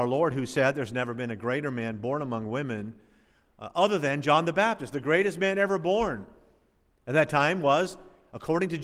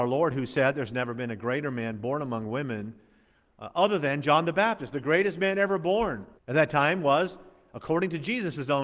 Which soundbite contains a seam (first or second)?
second